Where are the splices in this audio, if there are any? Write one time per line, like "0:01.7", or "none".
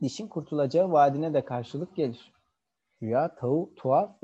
0:03.0